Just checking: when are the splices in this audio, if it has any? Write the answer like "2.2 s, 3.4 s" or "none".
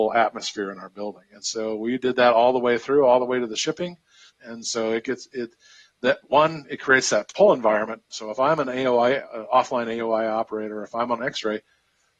4.3 s, 11.2 s